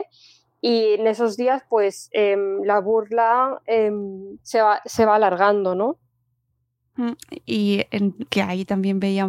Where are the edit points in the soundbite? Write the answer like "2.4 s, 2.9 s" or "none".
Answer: 4.4 s, 8.3 s